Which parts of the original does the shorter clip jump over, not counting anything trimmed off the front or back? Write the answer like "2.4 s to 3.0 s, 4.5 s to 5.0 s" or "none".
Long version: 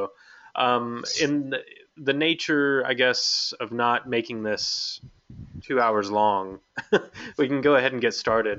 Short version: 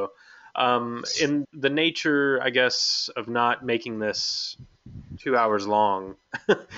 1.4 s to 1.9 s